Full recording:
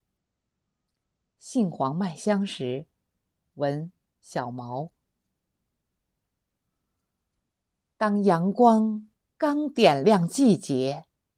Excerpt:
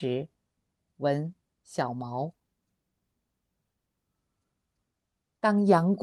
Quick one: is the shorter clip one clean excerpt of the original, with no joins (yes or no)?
yes